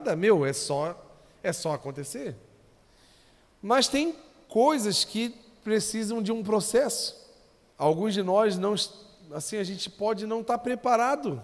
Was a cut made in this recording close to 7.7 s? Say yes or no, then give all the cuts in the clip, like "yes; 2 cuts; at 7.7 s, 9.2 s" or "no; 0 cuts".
yes; 1 cut; at 7.7 s